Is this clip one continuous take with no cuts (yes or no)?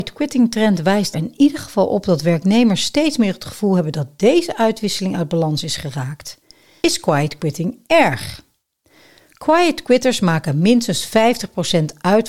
no